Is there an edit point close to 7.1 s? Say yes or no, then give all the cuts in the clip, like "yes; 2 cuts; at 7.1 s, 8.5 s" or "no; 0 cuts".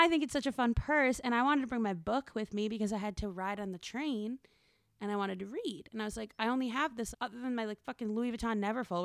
yes; 1 cut; at 7.1 s